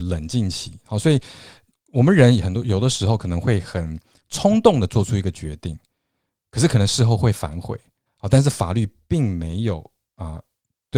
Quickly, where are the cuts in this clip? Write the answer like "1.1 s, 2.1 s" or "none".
8.1 s